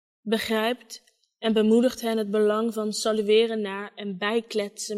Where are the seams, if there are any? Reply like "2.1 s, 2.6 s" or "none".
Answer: none